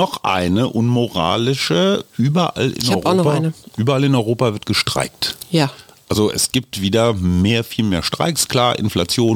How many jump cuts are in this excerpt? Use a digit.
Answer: 0